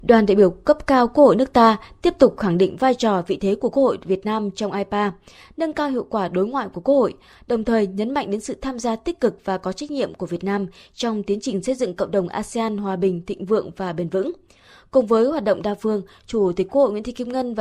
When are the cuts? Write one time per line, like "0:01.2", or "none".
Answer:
none